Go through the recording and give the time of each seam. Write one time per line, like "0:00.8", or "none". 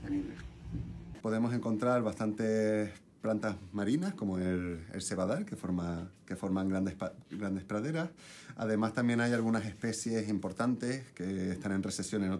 0:01.2